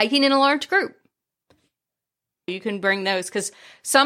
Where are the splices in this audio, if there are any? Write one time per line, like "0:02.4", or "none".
0:02.5